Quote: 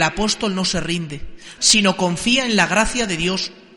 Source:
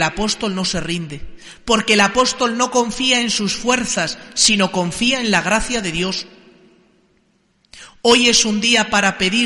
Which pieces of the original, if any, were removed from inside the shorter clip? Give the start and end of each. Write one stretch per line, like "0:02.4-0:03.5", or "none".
0:01.6-0:04.3